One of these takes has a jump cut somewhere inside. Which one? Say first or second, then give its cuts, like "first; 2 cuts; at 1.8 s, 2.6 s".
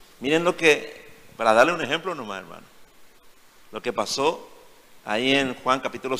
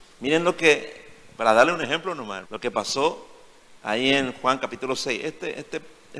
second; 1 cut; at 2.4 s